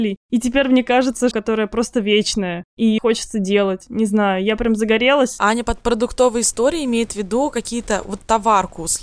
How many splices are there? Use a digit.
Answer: 2